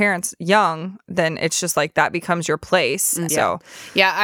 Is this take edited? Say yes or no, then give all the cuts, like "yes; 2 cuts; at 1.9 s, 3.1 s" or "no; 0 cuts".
yes; 1 cut; at 3.3 s